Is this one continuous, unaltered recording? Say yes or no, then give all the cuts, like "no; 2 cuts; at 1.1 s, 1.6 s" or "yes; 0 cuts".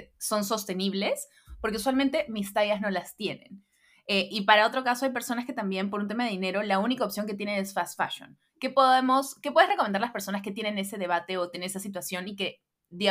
yes; 0 cuts